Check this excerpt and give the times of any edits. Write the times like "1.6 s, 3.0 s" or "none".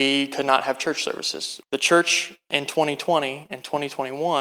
1.6 s